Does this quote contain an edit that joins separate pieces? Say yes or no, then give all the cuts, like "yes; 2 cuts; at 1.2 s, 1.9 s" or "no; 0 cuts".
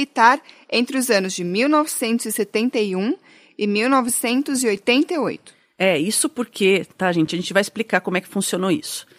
no; 0 cuts